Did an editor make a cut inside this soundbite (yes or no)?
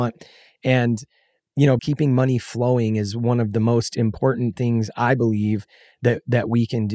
yes